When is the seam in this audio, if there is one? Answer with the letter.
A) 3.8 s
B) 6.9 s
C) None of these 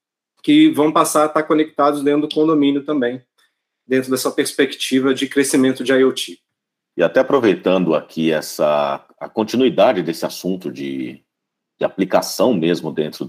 B